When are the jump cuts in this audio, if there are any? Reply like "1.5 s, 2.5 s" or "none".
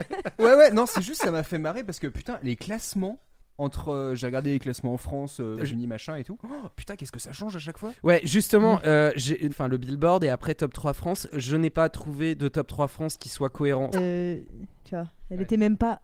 5.6 s, 9.5 s, 13.9 s